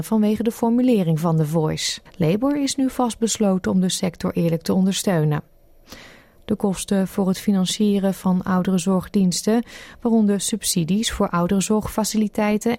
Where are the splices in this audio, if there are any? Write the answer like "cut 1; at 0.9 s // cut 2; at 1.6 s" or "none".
cut 1; at 2.1 s